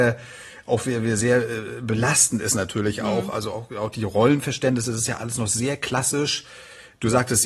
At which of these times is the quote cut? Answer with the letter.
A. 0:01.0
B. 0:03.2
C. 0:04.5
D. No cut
D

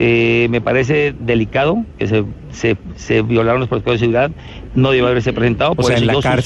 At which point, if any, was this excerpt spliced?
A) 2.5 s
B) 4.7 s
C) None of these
B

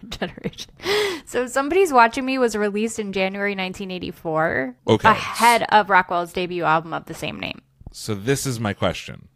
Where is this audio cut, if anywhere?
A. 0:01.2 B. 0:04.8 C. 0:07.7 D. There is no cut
B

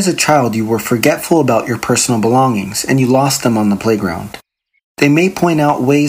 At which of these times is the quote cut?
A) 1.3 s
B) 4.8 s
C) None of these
B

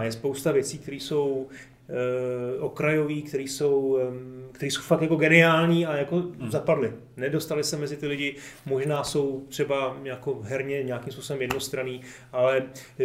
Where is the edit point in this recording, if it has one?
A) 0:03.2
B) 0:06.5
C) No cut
C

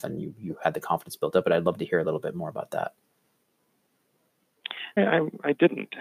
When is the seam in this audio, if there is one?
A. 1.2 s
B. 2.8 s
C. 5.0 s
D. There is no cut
C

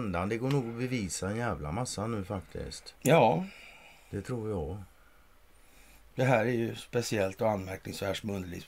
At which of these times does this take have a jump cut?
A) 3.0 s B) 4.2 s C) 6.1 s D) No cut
A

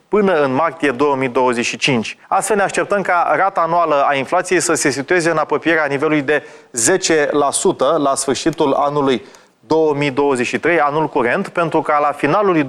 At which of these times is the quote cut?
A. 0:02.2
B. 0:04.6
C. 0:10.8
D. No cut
A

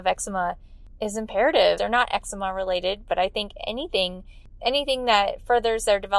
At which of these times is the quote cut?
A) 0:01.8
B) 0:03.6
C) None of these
A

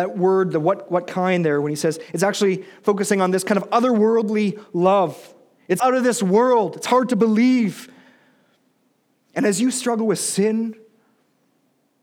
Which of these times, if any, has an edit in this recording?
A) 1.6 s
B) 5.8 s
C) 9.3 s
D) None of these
B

